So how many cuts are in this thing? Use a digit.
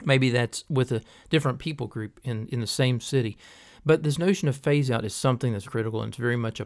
1